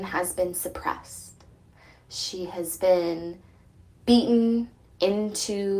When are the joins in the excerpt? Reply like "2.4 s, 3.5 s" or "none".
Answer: none